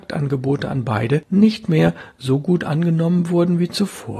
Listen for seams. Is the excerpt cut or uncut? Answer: uncut